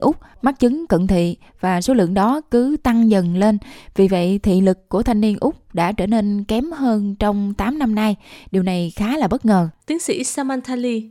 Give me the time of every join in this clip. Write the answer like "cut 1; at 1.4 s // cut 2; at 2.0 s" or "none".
cut 1; at 9.8 s

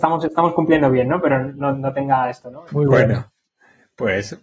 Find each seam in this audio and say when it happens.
cut 1; at 2.7 s

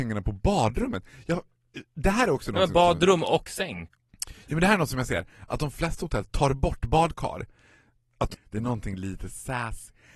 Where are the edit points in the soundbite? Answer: cut 1; at 8.3 s

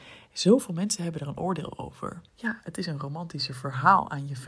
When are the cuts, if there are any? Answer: cut 1; at 2.3 s

